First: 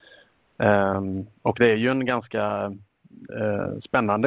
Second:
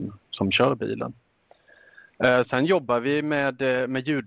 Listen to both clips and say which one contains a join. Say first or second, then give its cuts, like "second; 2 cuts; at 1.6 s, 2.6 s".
second; 1 cut; at 2.4 s